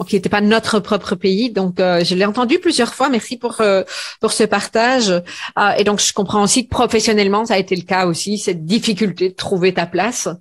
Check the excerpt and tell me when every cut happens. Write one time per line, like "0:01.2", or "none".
none